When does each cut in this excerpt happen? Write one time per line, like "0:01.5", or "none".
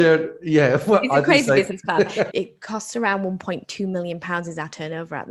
0:02.3